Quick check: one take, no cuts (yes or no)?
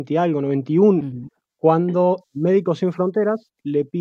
no